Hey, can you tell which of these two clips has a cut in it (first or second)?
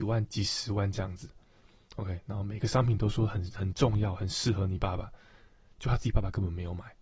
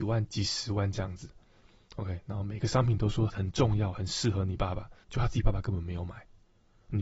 second